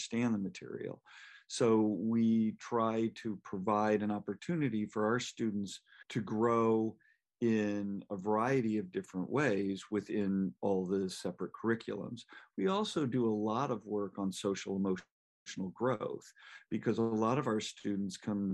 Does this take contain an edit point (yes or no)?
no